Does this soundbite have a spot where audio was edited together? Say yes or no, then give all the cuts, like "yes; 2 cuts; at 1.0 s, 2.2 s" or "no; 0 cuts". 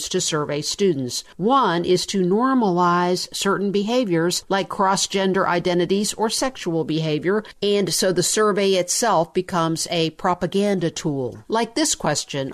no; 0 cuts